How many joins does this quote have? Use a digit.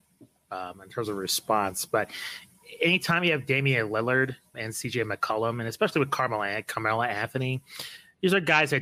1